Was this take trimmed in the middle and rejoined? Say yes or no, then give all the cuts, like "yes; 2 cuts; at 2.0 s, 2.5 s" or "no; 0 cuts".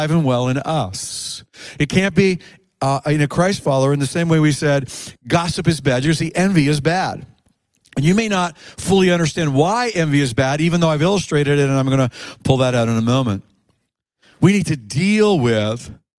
no; 0 cuts